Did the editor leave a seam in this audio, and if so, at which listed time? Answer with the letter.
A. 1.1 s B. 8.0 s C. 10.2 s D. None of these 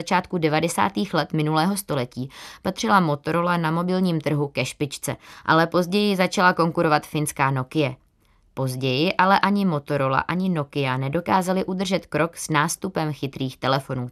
D